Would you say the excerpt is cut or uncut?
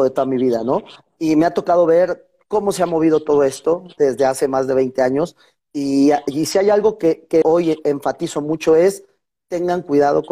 cut